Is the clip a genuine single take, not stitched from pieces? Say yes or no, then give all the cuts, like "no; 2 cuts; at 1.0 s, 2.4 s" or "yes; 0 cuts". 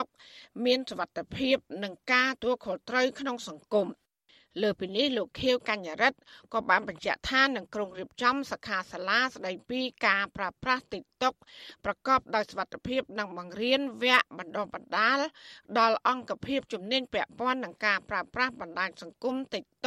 no; 1 cut; at 2.4 s